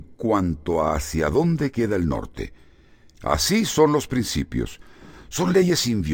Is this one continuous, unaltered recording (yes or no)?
no